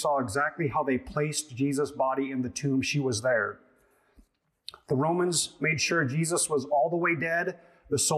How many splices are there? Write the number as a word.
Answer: zero